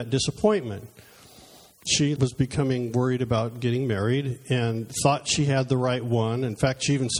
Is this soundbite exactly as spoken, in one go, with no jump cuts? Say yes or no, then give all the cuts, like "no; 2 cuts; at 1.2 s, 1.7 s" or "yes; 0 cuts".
no; 1 cut; at 2.2 s